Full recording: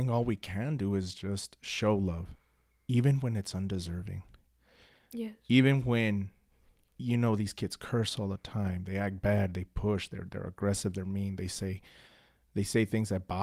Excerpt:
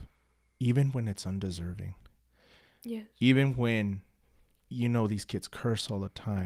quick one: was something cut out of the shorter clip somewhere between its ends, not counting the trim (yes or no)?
no